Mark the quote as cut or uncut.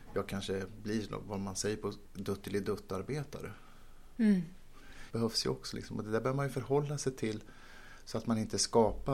cut